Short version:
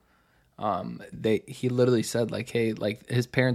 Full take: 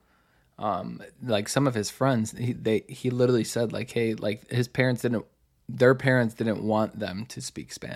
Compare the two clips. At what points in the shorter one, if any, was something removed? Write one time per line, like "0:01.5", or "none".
0:01.1